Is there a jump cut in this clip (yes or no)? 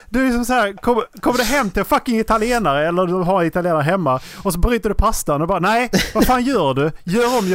no